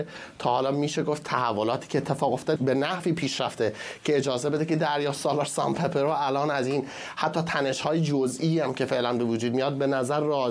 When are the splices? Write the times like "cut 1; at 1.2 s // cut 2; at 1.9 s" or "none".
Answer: cut 1; at 2.6 s